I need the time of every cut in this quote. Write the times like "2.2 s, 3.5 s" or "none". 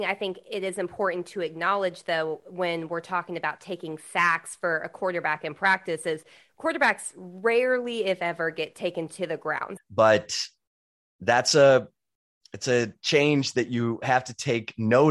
9.8 s

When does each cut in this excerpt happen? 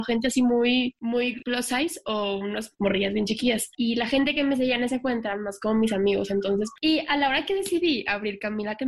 3.7 s

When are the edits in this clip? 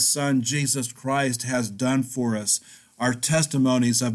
none

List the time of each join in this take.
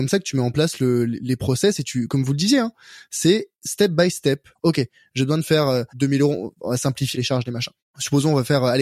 4.6 s, 5.9 s, 7.1 s

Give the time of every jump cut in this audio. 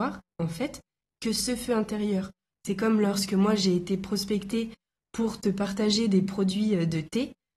2.5 s

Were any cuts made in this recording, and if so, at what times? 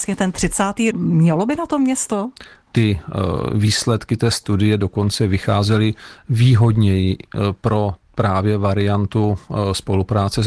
0.9 s, 2.7 s

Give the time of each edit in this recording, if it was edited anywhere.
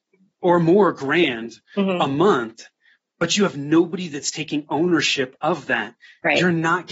none

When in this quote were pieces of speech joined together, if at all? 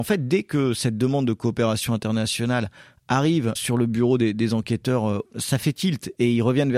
3.5 s, 5.2 s

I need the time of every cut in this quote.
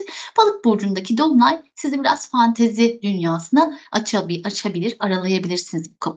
none

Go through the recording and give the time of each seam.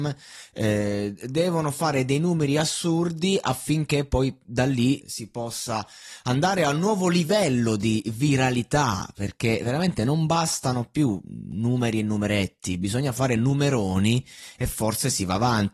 5.0 s

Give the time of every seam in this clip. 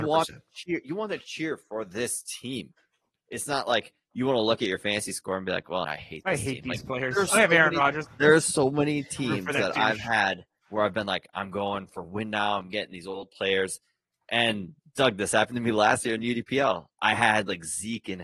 5.8 s, 8.0 s

